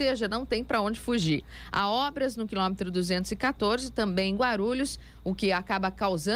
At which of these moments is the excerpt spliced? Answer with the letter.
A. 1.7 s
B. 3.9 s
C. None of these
C